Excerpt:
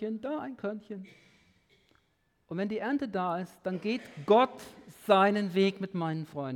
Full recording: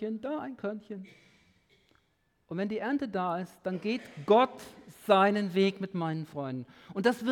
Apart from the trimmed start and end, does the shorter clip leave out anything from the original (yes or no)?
no